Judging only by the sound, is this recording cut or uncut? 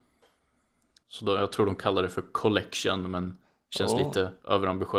cut